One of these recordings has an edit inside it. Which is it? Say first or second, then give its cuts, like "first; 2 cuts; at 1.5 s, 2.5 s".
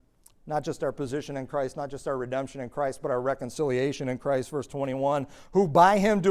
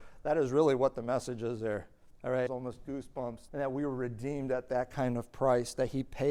second; 2 cuts; at 2.5 s, 3.5 s